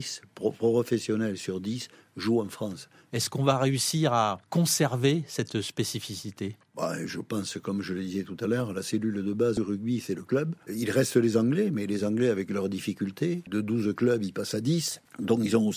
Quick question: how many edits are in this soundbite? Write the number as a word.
two